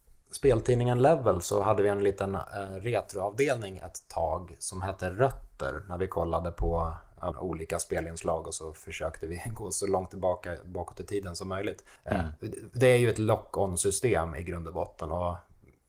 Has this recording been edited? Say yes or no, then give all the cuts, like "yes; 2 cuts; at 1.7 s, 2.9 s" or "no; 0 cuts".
yes; 2 cuts; at 7.3 s, 12.0 s